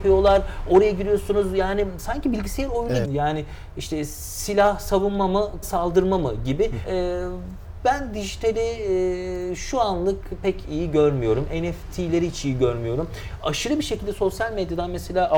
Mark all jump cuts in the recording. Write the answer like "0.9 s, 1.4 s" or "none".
3.0 s, 5.6 s, 6.8 s

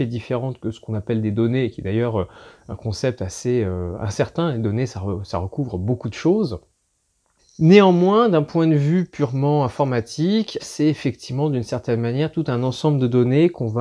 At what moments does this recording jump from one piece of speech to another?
7.4 s, 10.6 s

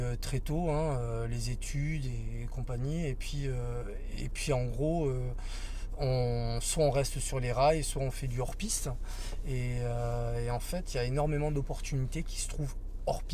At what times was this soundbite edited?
none

